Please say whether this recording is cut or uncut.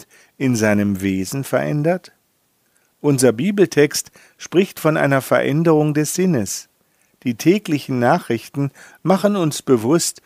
uncut